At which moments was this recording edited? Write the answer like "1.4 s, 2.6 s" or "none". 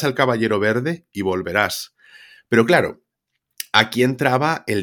none